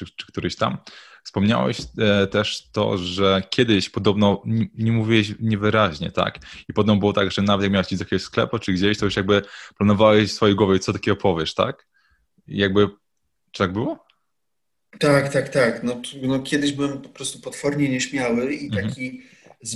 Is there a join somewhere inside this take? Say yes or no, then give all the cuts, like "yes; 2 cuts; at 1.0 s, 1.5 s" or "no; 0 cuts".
no; 0 cuts